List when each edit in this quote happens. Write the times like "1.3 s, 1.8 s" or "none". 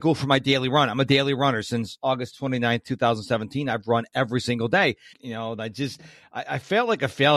5.1 s